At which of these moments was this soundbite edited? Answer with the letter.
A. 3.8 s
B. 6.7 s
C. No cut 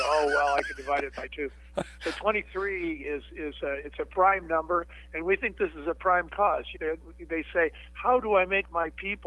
B